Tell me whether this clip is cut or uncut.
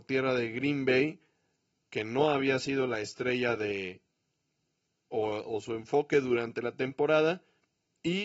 uncut